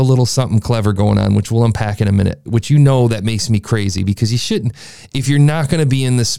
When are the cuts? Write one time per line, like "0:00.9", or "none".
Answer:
0:02.5